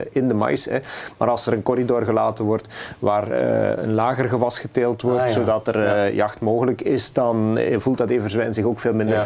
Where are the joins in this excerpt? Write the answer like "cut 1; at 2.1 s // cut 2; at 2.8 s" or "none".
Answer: none

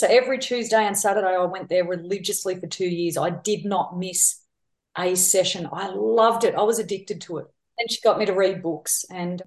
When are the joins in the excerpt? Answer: cut 1; at 7.7 s

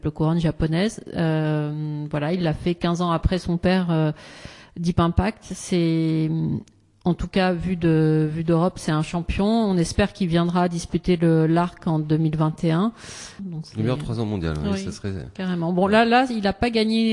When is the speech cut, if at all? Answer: cut 1; at 13.4 s

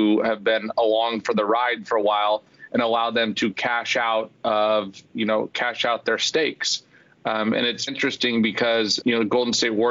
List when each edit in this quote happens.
cut 1; at 7.9 s // cut 2; at 9.0 s

